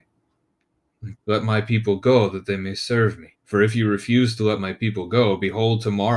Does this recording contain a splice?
yes; 2 cuts; at 1.1 s, 3.3 s

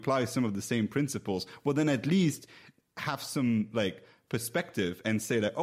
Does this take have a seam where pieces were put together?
no; 0 cuts

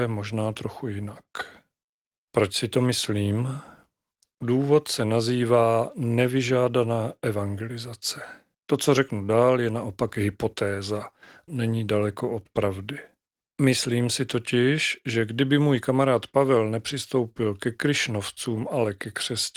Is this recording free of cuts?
no; 3 cuts; at 2.3 s, 8.5 s, 11.5 s

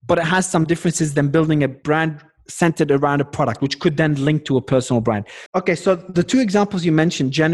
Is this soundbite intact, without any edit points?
no; 1 cut; at 5.5 s

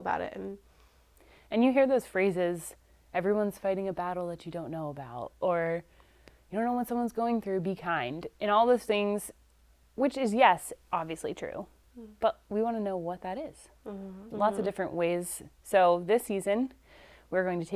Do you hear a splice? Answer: yes; 1 cut; at 14.3 s

